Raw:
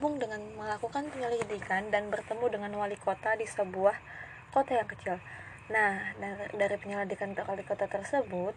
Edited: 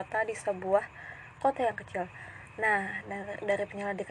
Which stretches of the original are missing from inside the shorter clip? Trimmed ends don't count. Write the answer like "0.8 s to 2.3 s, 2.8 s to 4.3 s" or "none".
none

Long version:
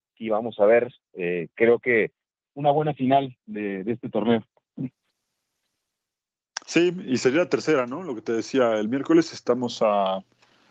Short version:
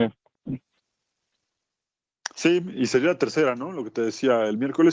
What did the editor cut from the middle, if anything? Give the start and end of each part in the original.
none

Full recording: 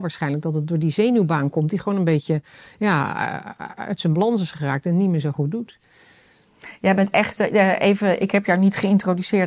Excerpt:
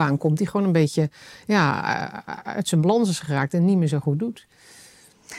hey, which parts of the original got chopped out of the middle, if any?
none

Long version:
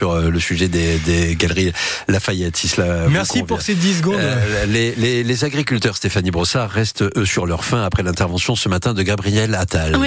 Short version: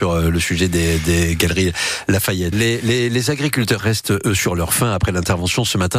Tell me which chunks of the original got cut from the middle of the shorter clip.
2.5 s to 4.7 s, 5.9 s to 6.7 s

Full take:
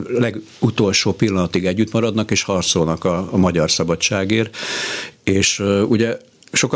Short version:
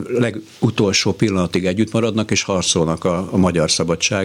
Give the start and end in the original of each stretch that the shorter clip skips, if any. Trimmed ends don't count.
none

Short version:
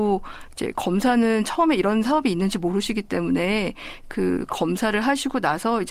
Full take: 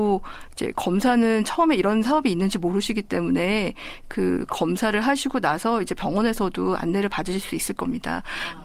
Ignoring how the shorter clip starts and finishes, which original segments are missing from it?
none

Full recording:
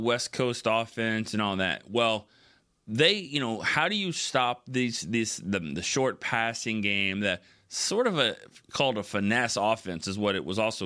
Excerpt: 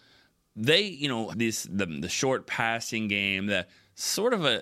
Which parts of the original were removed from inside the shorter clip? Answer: 3.6 s to 5.0 s

